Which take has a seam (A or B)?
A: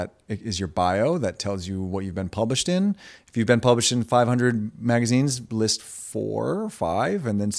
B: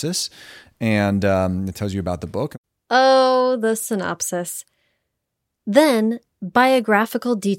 B